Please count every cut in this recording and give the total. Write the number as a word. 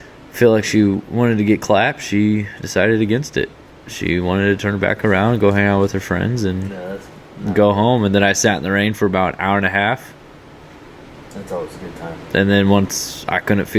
zero